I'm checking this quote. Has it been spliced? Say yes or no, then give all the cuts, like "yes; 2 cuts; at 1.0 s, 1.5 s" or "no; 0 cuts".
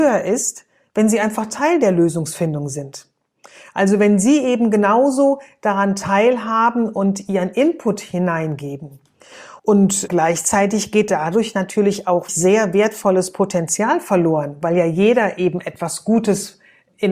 yes; 2 cuts; at 9.6 s, 12.3 s